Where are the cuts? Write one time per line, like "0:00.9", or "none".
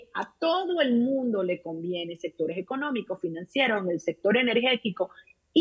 none